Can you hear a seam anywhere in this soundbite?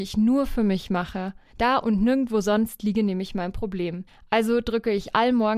yes; 1 cut; at 1.5 s

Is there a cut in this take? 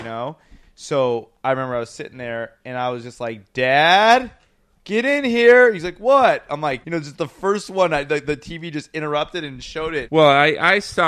yes; 2 cuts; at 6.8 s, 10.1 s

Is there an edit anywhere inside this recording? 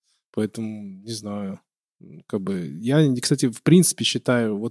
no; 0 cuts

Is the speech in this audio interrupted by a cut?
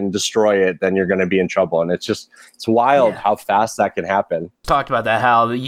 yes; 1 cut; at 4.5 s

